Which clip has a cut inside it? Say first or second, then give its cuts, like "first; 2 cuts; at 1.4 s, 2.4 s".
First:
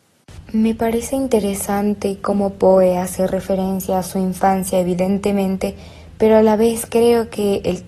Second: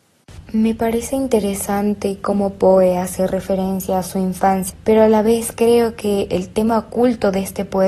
second; 1 cut; at 4.7 s